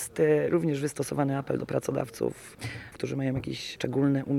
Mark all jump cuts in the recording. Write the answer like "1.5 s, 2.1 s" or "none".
2.9 s